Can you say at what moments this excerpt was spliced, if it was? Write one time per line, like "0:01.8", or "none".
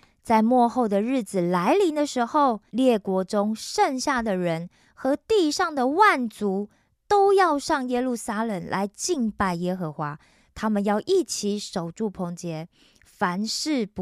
0:02.7